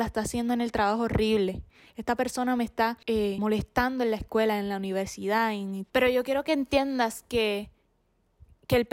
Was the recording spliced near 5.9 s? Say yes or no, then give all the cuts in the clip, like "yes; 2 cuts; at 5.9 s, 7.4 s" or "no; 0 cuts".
yes; 1 cut; at 5.9 s